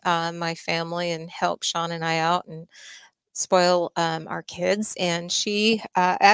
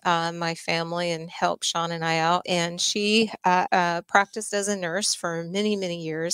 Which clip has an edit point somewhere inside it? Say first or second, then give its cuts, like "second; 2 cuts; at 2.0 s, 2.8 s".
second; 2 cuts; at 2.4 s, 3.7 s